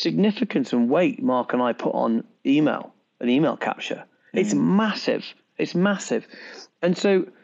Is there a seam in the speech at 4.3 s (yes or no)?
no